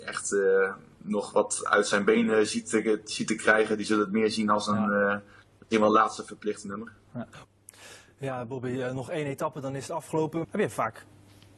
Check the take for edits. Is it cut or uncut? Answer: cut